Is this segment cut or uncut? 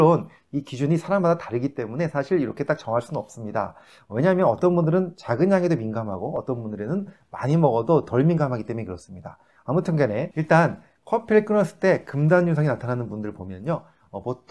uncut